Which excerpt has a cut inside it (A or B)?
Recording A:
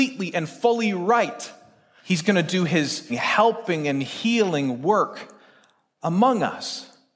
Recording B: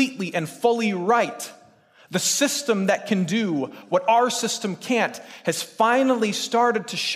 A